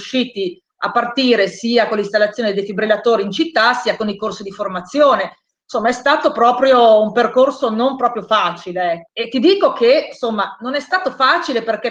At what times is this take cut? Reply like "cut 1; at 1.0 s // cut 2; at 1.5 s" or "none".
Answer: cut 1; at 5.6 s // cut 2; at 9.1 s